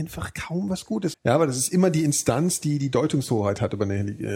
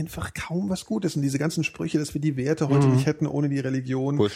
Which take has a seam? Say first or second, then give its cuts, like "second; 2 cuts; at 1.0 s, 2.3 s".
first; 1 cut; at 1.1 s